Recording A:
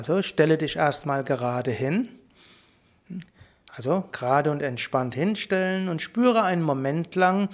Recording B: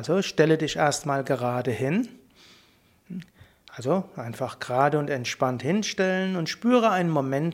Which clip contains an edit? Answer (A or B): A